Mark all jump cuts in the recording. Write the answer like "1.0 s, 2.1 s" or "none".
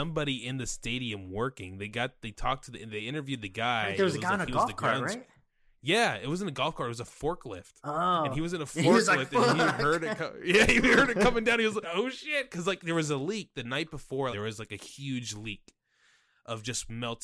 11.8 s, 14.3 s